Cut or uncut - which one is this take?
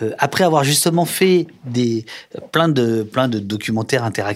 uncut